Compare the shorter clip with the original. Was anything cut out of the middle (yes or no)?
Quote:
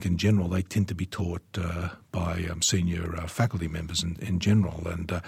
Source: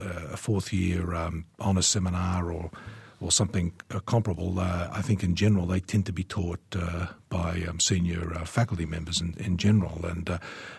no